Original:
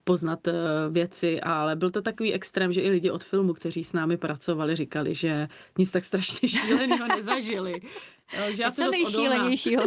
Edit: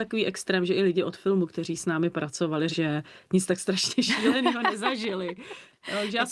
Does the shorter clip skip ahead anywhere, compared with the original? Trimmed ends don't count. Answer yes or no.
yes